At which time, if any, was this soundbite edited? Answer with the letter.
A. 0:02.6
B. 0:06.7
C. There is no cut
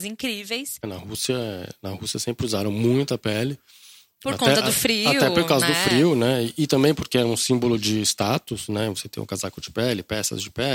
C